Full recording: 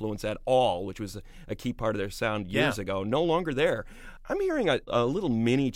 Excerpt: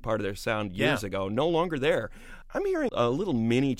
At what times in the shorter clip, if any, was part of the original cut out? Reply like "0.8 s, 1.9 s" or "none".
2.9 s